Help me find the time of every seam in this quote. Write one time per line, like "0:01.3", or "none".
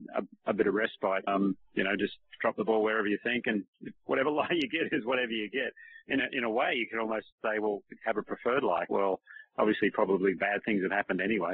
0:01.3
0:07.3
0:08.9

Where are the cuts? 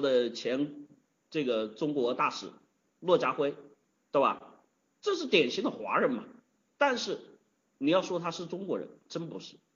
none

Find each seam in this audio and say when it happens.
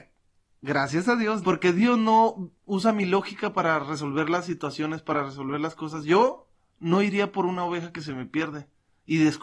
0:01.4

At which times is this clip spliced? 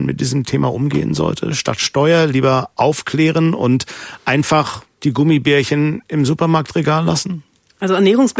none

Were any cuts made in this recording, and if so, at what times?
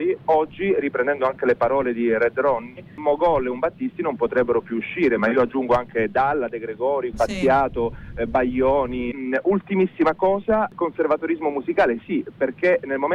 0:07.1
0:09.1

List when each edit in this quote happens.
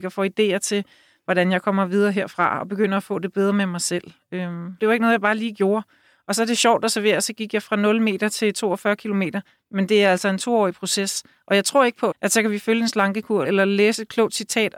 0:04.8
0:12.1
0:13.4

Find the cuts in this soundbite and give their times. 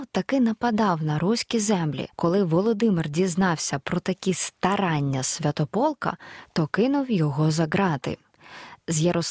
0:02.1

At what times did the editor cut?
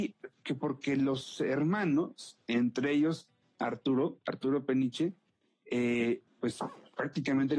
none

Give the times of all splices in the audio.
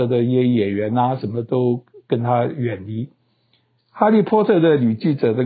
0:03.8

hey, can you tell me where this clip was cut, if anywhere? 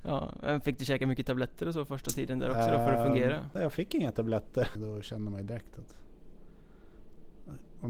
0:03.6
0:04.8

